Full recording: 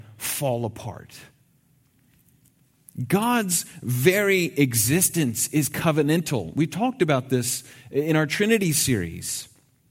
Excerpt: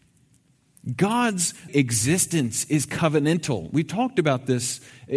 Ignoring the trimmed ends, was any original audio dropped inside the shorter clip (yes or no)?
yes